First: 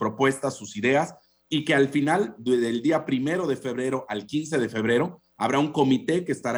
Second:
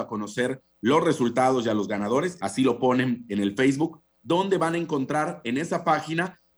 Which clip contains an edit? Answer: second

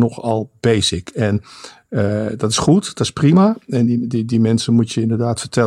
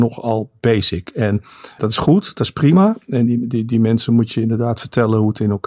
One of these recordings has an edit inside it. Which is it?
second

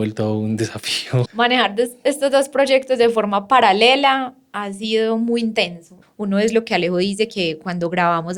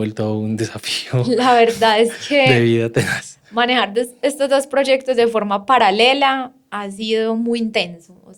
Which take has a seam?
first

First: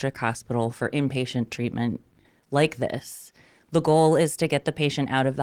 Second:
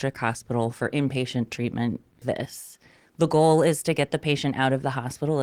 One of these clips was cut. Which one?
second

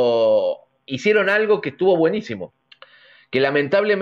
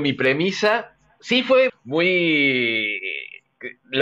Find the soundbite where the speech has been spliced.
second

